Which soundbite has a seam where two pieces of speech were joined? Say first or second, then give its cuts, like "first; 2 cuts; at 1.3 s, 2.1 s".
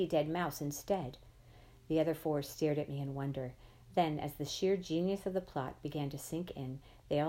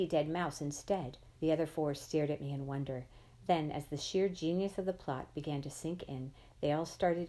second; 1 cut; at 1.4 s